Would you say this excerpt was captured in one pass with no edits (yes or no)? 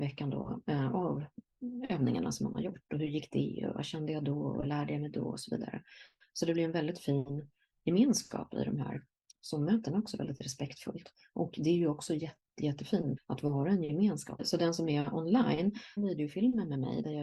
no